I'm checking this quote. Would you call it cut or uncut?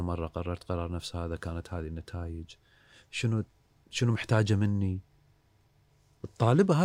uncut